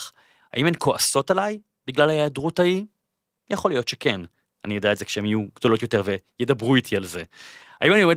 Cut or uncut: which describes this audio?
uncut